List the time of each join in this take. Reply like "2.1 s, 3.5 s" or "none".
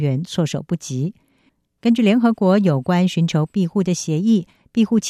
none